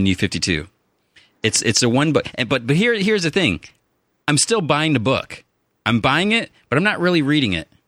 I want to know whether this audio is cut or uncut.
uncut